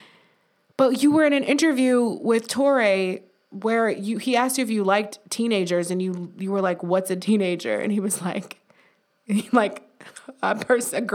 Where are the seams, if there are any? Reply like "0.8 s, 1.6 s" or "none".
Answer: none